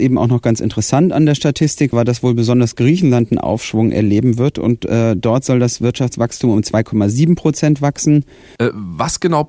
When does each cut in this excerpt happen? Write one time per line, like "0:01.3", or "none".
0:01.9
0:08.6